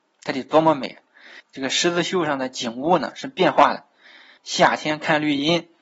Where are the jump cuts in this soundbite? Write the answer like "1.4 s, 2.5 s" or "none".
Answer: 1.4 s, 4.4 s